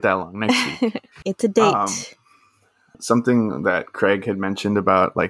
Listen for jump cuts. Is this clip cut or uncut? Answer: cut